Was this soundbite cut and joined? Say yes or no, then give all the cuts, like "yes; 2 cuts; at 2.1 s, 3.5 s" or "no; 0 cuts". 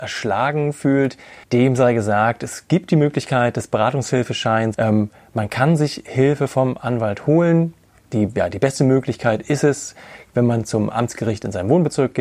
yes; 2 cuts; at 1.4 s, 4.7 s